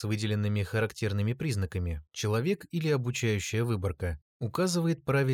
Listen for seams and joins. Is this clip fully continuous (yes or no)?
no